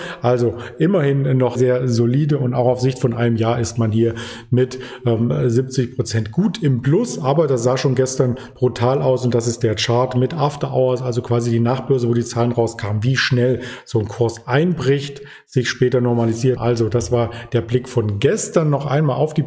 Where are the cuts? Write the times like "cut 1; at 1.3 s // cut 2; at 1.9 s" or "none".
cut 1; at 1.6 s // cut 2; at 16.6 s

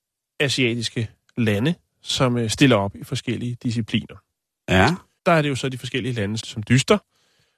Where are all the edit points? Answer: cut 1; at 5.2 s // cut 2; at 6.4 s

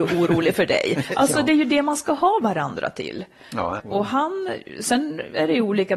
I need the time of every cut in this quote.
cut 1; at 3.8 s

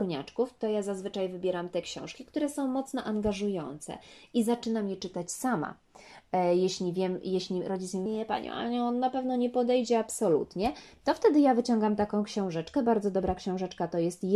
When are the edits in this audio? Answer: cut 1; at 8.1 s

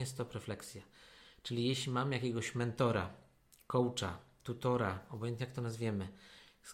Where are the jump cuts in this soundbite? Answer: none

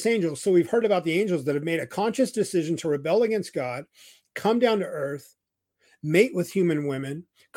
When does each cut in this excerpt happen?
none

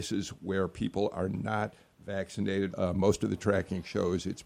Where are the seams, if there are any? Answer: cut 1; at 2.7 s

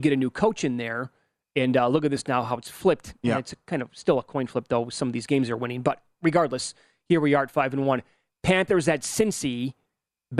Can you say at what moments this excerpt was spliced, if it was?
none

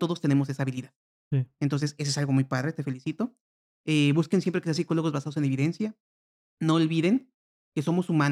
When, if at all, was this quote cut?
none

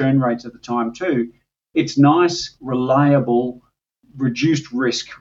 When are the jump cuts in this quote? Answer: cut 1; at 2.6 s

